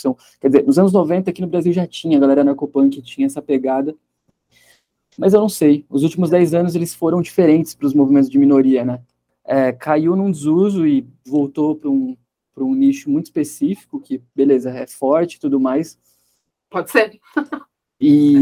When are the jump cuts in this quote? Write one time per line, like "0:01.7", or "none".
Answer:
0:09.3
0:16.5